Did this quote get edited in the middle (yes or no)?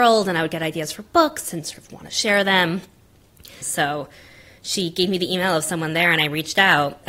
yes